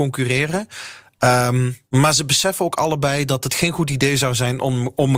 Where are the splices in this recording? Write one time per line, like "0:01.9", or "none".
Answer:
0:01.8

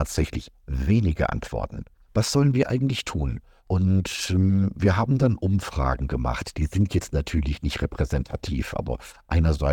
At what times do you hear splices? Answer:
0:02.0

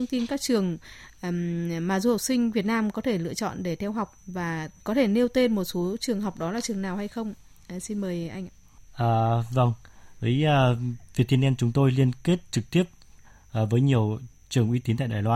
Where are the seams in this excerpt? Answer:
none

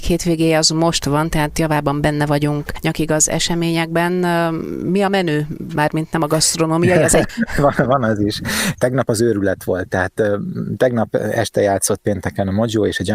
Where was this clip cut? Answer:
0:08.7

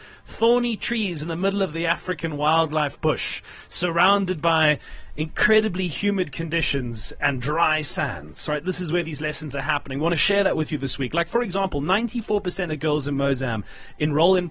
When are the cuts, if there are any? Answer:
none

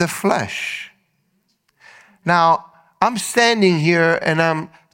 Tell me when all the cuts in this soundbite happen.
none

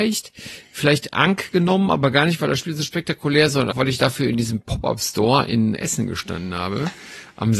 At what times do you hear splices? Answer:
0:03.7
0:05.8

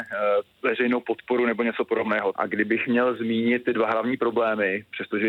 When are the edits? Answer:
0:02.3

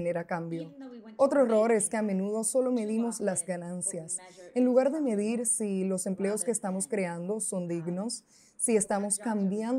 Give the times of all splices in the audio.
none

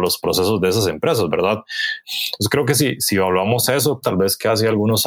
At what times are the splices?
0:02.0
0:04.0

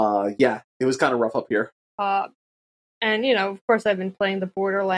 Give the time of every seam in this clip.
0:01.9

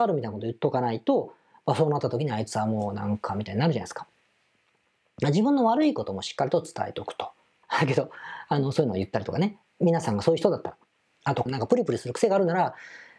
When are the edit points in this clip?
0:07.6
0:11.5

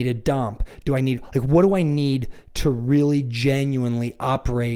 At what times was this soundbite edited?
none

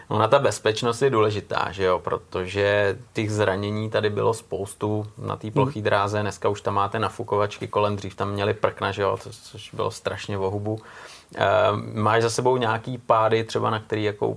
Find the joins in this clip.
none

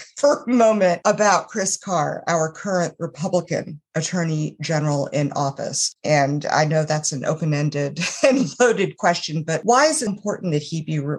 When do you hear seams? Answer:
0:05.9
0:10.1

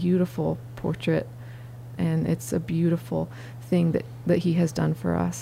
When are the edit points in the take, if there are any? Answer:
0:02.0

